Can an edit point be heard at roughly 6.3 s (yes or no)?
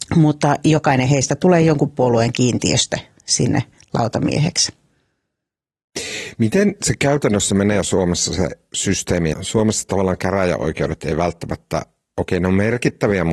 no